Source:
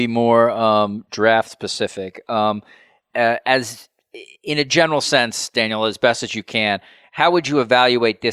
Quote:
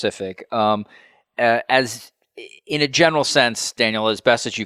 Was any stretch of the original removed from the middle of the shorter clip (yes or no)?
no